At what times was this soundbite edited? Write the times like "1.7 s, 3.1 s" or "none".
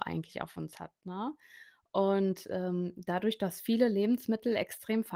none